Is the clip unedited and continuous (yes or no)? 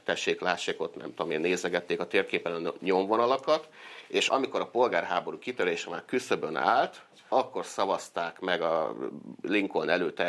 no